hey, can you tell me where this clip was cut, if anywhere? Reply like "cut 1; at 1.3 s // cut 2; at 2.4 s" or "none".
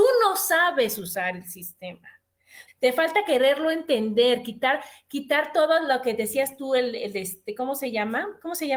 cut 1; at 2.7 s